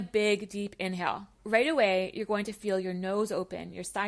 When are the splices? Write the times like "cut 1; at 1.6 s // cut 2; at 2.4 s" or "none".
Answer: cut 1; at 1.3 s